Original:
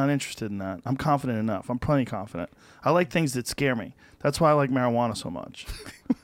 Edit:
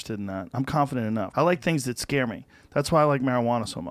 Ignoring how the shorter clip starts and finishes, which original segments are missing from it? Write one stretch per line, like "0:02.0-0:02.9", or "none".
0:01.6-0:02.8

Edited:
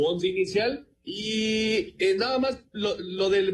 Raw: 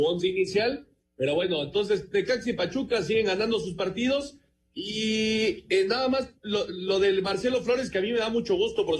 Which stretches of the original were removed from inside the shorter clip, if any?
0:00.9-0:04.6

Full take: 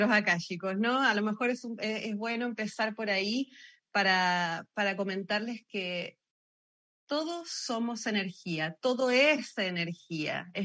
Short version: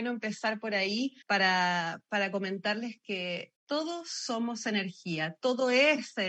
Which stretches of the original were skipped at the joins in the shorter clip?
0:03.6-0:03.9
0:06.2-0:07.0

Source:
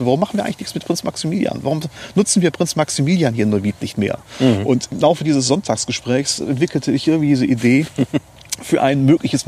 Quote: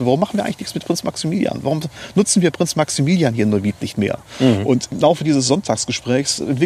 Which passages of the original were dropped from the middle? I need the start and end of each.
none

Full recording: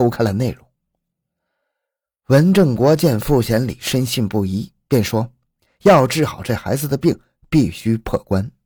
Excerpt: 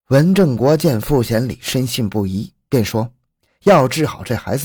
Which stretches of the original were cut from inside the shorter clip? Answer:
none

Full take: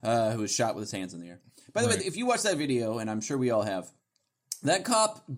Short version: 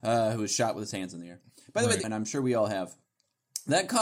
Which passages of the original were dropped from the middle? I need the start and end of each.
0:02.0-0:03.0

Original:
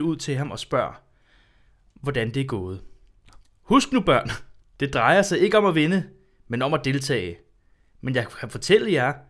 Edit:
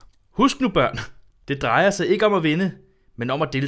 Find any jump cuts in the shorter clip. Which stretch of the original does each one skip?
none

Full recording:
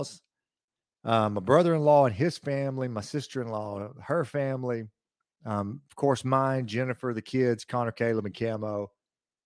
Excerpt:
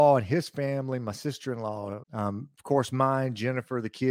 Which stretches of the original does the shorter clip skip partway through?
0:03.9-0:05.4

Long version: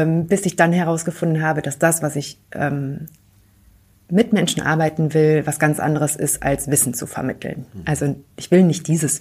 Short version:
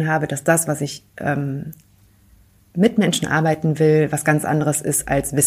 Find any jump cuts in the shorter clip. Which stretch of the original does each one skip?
none

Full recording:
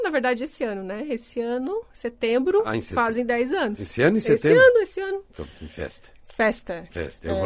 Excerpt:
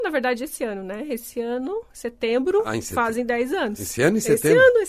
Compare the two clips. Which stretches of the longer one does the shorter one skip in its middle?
none

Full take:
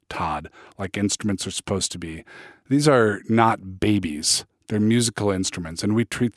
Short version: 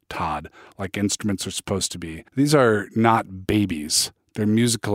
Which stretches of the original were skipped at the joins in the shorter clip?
0:02.3-0:02.6

